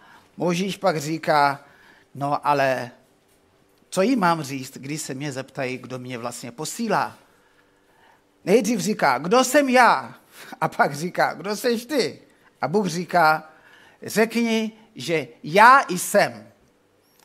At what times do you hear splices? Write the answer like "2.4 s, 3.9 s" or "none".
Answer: 12.4 s